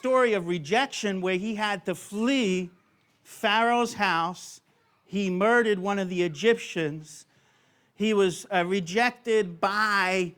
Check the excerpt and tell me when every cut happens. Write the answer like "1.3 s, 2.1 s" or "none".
none

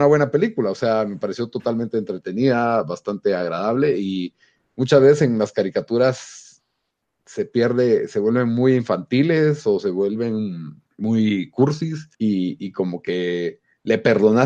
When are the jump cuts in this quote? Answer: 10.9 s, 12.1 s

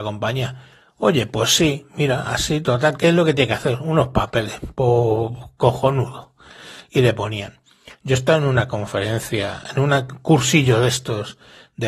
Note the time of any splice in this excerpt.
none

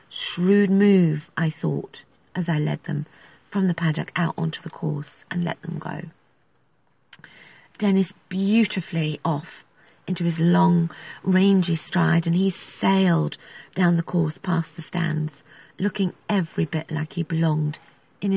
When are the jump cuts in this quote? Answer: none

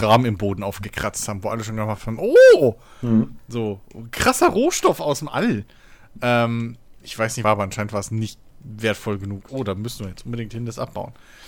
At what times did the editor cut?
7.4 s, 9.5 s

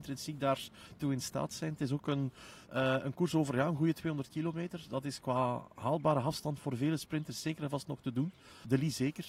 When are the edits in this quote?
2.6 s, 5.2 s

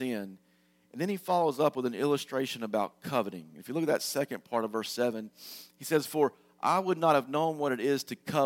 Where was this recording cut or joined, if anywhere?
none

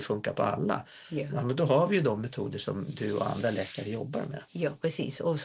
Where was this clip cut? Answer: 4.5 s

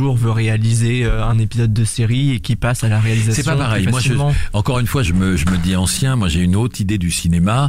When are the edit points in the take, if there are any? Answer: 5.0 s

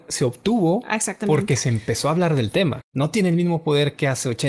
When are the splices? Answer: 2.8 s

